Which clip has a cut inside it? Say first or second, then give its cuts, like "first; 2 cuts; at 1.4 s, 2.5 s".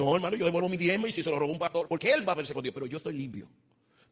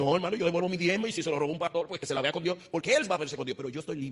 first; 1 cut; at 1.9 s